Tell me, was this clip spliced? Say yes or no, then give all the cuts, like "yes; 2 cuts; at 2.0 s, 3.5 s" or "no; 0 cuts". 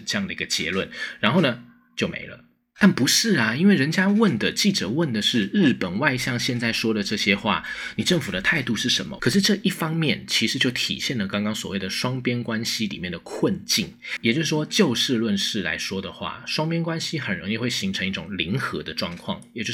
yes; 1 cut; at 9.2 s